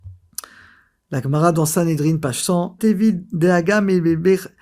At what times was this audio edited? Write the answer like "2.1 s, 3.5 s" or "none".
2.8 s